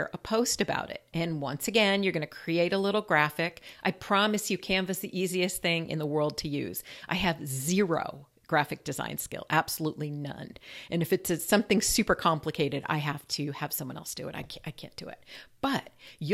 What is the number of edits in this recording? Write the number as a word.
zero